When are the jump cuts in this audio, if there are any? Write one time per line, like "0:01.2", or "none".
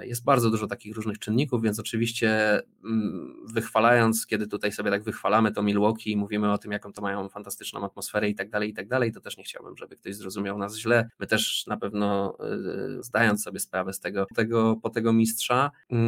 0:13.0
0:14.3